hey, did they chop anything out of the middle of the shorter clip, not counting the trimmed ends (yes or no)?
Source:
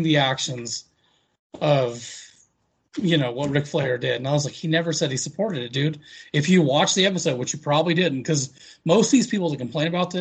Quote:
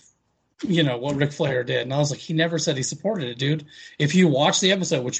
no